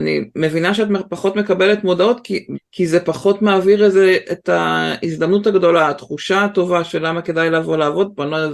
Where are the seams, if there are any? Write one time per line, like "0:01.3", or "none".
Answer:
0:02.5